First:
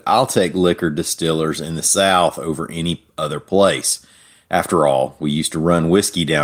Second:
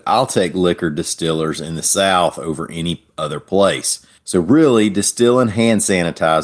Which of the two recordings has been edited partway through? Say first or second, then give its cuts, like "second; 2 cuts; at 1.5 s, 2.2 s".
second; 1 cut; at 4.2 s